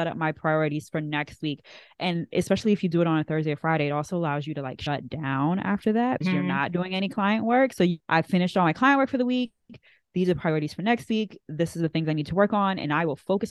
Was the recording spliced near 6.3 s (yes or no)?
no